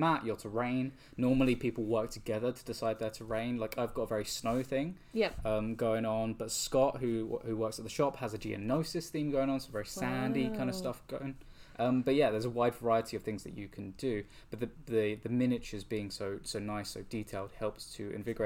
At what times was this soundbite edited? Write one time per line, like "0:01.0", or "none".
none